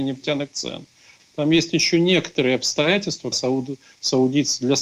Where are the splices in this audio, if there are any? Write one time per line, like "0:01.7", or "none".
0:01.2
0:03.3